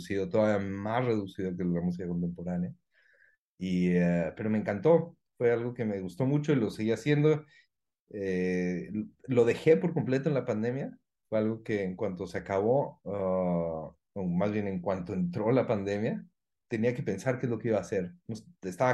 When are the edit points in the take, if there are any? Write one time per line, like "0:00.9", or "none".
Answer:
none